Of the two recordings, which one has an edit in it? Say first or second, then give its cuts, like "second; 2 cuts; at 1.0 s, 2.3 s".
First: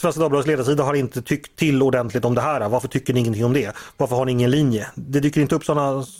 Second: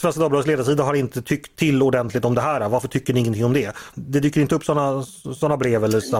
second; 1 cut; at 3.9 s